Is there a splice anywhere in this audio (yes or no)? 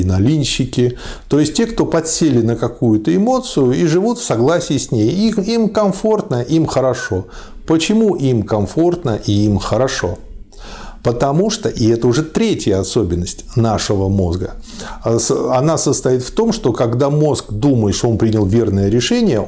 no